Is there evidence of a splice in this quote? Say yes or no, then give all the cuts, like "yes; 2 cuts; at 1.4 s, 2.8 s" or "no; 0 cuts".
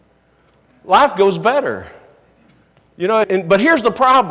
yes; 1 cut; at 3.2 s